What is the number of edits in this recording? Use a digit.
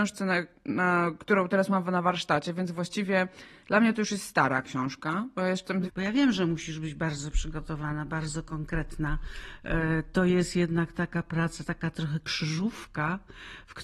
1